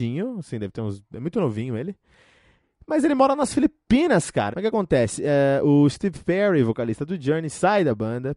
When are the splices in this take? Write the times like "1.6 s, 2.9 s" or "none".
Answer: 4.5 s